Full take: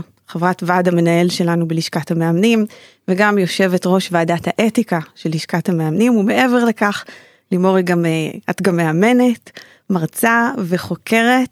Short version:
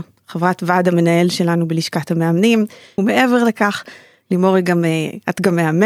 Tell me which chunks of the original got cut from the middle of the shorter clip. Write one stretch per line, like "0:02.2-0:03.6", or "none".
0:03.0-0:06.2